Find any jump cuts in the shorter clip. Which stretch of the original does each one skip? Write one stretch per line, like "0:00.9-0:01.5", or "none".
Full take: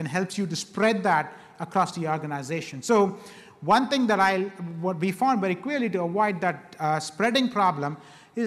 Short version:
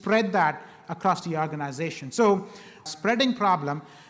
0:03.6-0:07.0